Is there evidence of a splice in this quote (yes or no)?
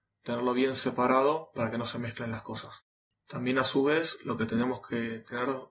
yes